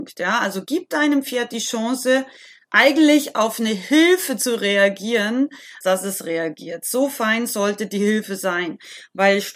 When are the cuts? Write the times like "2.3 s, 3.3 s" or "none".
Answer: 5.8 s